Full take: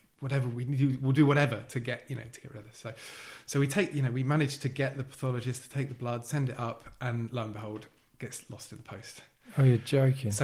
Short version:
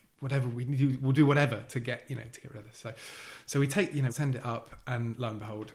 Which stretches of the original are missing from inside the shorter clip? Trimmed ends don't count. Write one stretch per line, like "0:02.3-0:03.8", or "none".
0:04.1-0:06.2